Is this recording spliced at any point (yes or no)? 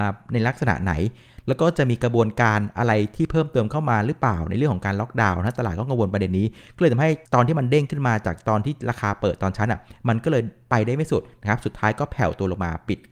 yes